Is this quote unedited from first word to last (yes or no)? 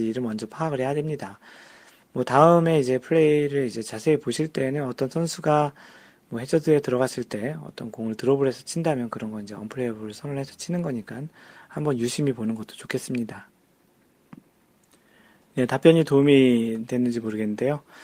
no